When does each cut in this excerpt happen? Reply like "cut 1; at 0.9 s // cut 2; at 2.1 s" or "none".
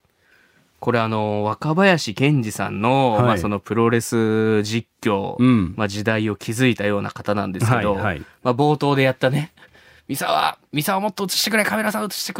none